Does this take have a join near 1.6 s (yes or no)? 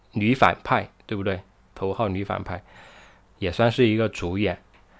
no